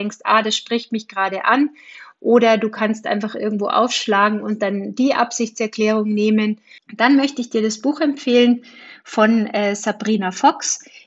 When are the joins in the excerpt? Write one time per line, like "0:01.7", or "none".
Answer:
0:06.8